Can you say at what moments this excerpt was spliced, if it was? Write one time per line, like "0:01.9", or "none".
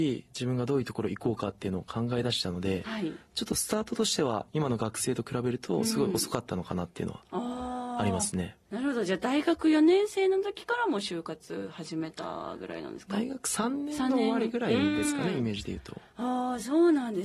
none